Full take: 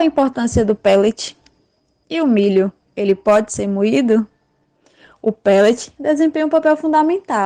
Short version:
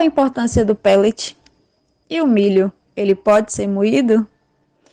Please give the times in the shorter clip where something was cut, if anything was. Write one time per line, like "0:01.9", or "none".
none